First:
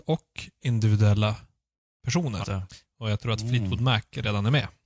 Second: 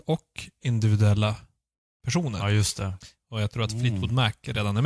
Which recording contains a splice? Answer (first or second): first